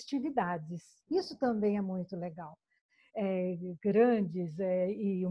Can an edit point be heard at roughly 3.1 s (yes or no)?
yes